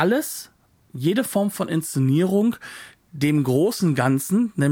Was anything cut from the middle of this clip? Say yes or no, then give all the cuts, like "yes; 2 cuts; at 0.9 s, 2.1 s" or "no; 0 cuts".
no; 0 cuts